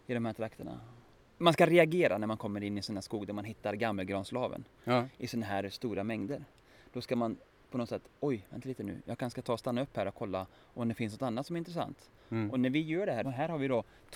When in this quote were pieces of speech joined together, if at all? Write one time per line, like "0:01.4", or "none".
0:13.2